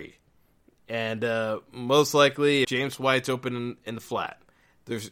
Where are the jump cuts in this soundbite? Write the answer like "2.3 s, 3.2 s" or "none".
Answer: 2.6 s